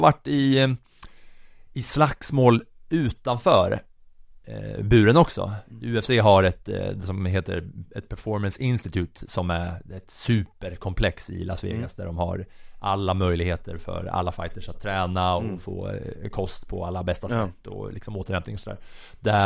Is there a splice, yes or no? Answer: no